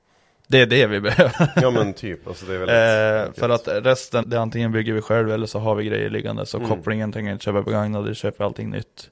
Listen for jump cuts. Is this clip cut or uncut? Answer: cut